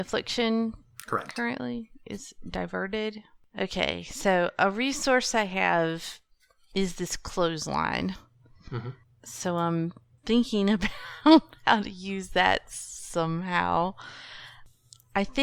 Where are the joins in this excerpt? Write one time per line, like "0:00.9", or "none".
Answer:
none